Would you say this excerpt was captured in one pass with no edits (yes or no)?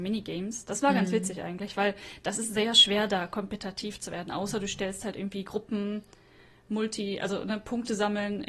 yes